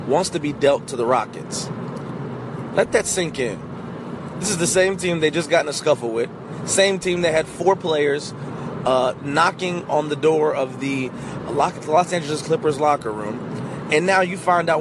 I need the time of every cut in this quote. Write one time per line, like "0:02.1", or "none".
none